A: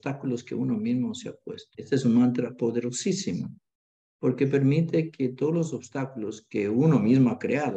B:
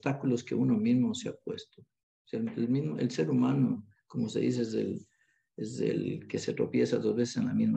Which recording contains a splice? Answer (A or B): A